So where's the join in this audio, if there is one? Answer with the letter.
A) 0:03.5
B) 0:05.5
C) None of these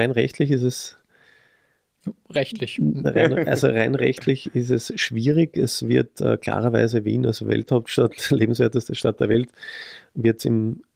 C